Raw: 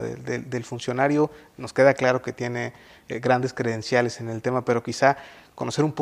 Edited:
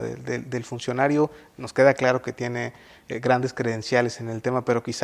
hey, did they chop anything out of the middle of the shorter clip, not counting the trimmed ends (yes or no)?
no